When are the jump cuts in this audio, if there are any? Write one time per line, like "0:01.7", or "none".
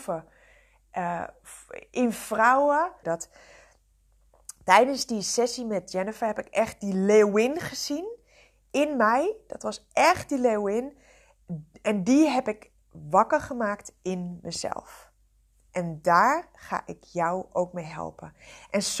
0:03.0